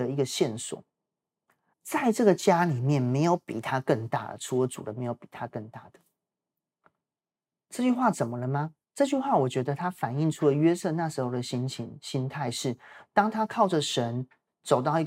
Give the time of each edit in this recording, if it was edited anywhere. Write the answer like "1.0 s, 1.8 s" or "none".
1.7 s, 8.8 s

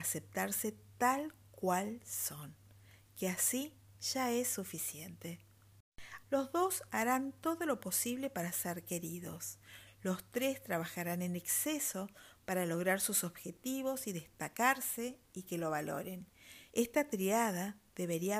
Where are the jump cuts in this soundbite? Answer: 6.2 s, 16.7 s

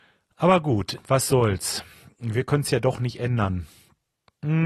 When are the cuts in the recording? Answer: 1.0 s

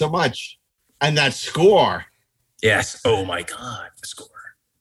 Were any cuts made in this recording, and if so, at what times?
0.9 s

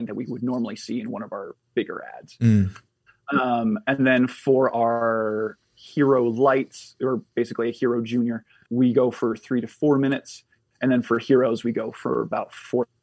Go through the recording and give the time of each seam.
8.7 s

